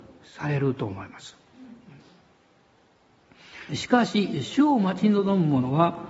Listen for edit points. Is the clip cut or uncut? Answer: cut